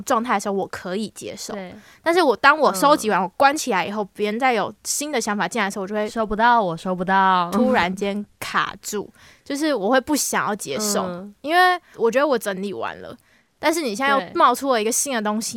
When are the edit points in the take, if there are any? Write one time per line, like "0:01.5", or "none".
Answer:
none